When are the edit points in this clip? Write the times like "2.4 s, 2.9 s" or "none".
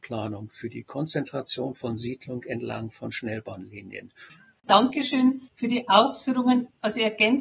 4.3 s